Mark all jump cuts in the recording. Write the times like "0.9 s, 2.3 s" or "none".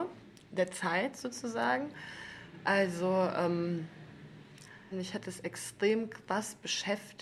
4.9 s